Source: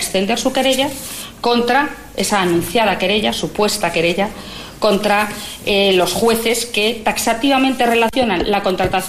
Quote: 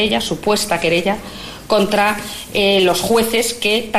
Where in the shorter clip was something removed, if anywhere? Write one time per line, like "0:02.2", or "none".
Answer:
none